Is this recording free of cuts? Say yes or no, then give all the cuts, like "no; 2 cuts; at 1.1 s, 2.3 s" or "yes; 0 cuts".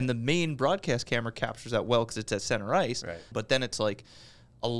no; 1 cut; at 3.3 s